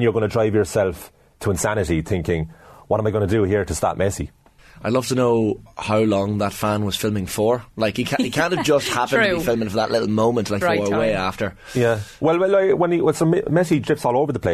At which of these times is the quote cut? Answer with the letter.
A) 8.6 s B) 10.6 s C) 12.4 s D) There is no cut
B